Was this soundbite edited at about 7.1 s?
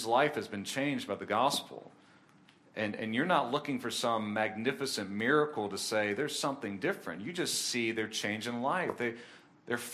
no; 0 cuts

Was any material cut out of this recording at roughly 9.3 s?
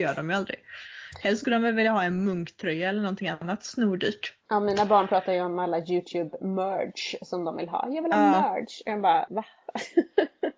yes; 1 cut; at 9.3 s

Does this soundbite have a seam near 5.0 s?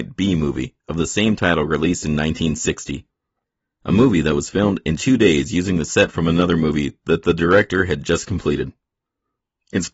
yes; 1 cut; at 5.0 s

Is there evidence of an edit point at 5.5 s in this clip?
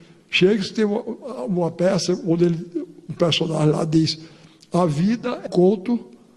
yes; 1 cut; at 5.5 s

